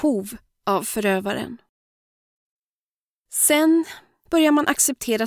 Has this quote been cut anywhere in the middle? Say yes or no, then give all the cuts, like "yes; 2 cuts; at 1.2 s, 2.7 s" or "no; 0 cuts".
yes; 1 cut; at 4.3 s